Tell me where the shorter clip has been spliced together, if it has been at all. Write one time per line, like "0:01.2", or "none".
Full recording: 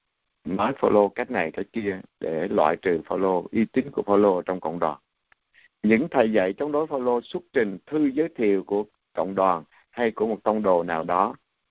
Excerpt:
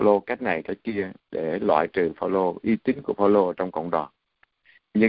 none